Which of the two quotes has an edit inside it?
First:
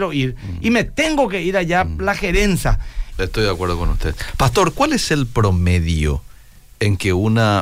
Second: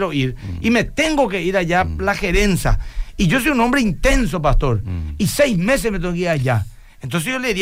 first; 1 cut; at 3.1 s

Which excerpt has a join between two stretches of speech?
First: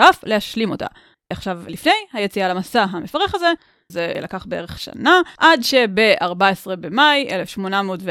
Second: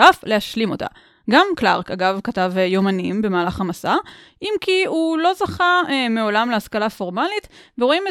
first; 3 cuts; at 1.1 s, 3.9 s, 5.4 s

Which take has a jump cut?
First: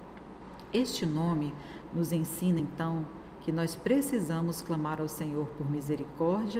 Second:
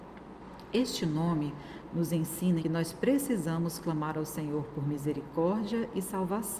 second; 1 cut; at 2.6 s

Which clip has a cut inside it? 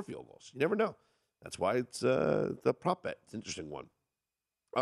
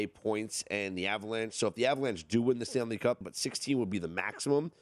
second; 1 cut; at 3.2 s

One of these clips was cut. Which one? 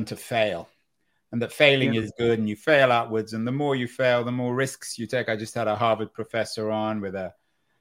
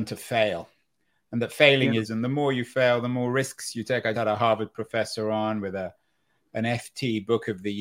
second; 2 cuts; at 2.0 s, 4.1 s

